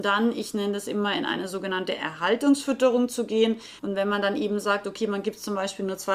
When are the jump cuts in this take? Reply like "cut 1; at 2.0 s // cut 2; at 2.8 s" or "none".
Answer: cut 1; at 3.8 s